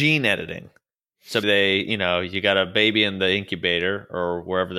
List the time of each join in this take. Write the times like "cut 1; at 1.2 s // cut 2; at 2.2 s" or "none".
cut 1; at 1.4 s